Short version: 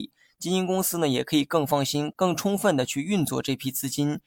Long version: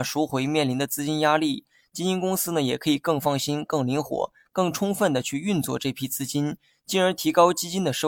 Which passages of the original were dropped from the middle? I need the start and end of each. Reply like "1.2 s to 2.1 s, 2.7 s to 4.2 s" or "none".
3.7 s to 4.5 s